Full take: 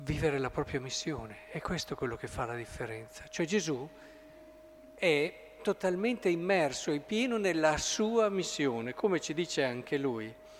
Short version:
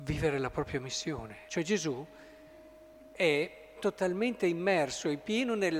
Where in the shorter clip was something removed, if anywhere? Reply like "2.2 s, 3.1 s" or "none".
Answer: 1.5 s